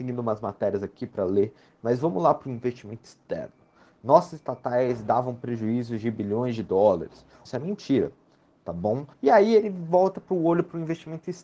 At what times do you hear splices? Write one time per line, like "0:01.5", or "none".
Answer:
0:07.4
0:09.1